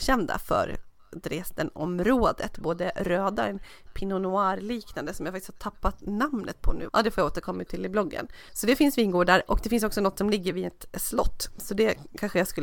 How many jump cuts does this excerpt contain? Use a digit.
2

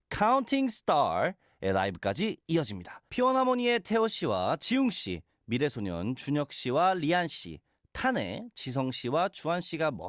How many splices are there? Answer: 1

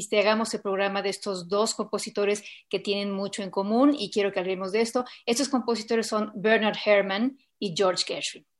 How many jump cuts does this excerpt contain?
0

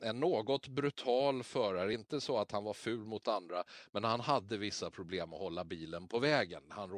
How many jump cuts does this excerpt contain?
0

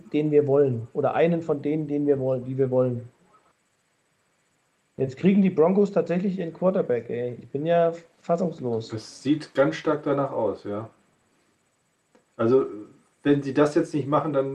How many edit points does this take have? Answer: 0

